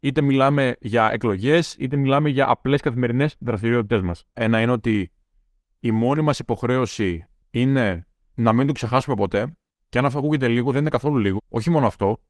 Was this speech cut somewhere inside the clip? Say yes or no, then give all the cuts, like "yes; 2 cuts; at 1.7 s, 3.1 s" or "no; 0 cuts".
yes; 2 cuts; at 4.3 s, 11.4 s